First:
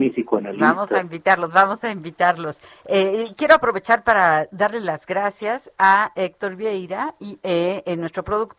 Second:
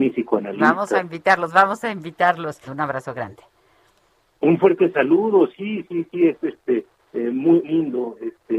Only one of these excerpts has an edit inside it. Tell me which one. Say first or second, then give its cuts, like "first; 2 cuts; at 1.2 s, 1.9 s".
second; 2 cuts; at 2.7 s, 7.6 s